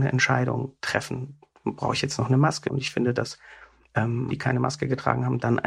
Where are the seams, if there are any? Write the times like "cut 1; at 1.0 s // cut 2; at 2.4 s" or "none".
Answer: cut 1; at 2.7 s // cut 2; at 4.3 s